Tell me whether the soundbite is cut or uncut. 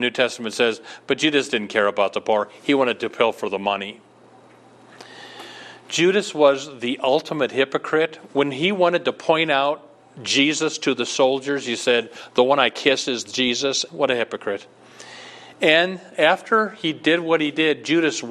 cut